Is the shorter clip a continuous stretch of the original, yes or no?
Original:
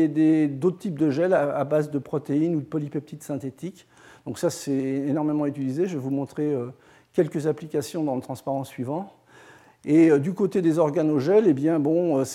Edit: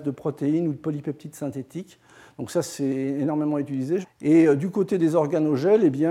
no